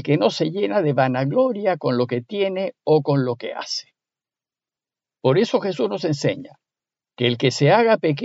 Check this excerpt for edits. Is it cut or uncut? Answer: uncut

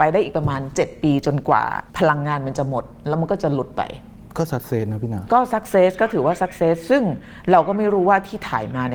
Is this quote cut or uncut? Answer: cut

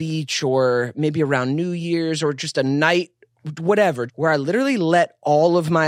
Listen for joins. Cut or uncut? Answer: cut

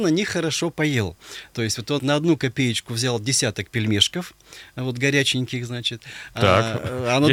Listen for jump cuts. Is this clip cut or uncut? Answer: cut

